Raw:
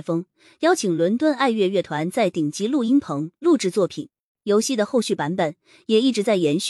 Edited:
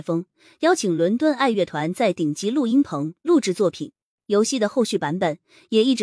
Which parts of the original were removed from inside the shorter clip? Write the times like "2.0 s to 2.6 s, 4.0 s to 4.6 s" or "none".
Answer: 1.5 s to 1.7 s

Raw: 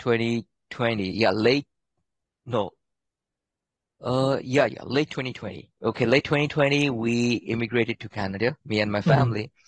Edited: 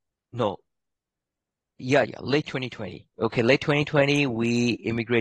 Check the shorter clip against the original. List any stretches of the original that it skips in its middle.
3.9 s to 4.4 s

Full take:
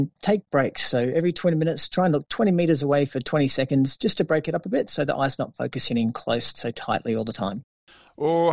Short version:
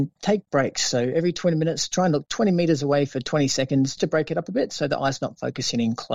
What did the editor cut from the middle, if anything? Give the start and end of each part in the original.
4.0 s to 4.1 s

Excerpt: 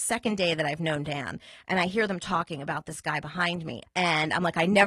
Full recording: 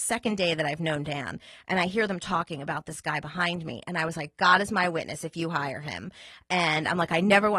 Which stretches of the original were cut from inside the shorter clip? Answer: 3.8 s to 6.4 s

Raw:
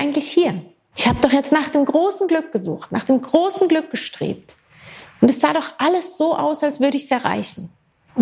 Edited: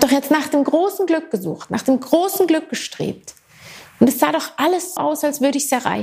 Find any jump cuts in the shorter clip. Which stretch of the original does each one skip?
6.2 s to 6.4 s

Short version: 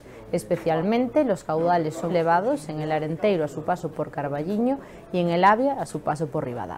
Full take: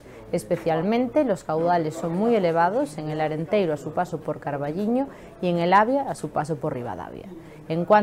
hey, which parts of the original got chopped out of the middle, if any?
2.1 s to 2.4 s

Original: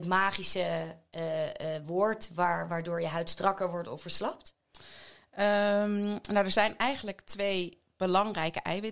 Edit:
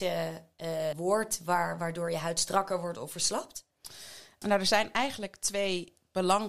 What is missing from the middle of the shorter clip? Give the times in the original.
1.5 s to 1.8 s, 5.3 s to 6.3 s

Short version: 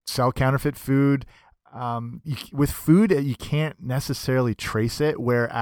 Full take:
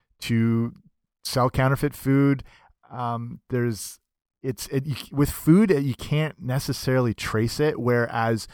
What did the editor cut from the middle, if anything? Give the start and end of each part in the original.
3.4 s to 4.8 s

